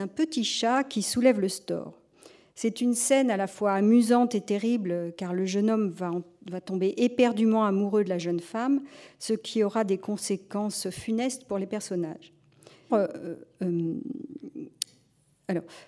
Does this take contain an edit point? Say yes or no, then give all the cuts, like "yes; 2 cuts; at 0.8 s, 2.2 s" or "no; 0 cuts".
yes; 1 cut; at 12.9 s